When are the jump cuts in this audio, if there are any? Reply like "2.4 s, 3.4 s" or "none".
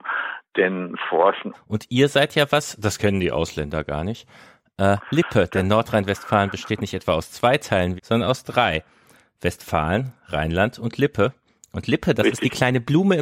1.5 s, 8.0 s